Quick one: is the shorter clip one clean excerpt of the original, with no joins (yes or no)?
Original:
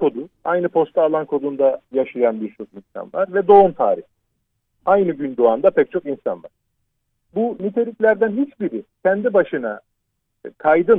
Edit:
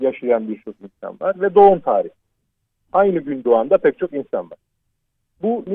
yes